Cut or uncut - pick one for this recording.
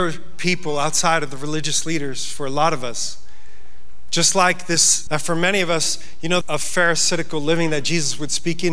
cut